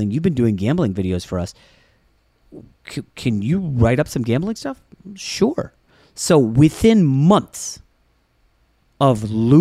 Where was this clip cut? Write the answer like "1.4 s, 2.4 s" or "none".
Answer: none